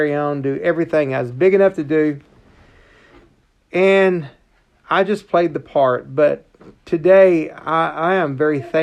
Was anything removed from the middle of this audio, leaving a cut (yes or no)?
no